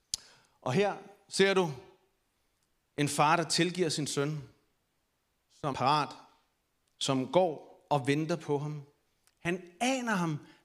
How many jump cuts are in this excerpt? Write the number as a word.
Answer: one